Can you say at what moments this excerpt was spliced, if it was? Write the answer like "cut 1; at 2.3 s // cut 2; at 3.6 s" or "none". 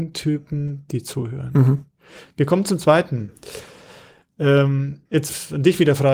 cut 1; at 5.1 s